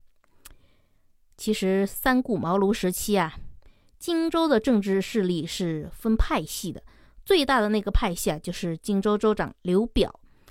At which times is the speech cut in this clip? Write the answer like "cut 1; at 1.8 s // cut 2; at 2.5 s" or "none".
none